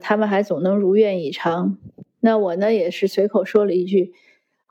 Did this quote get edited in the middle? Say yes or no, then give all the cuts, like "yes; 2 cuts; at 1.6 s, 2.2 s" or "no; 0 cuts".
no; 0 cuts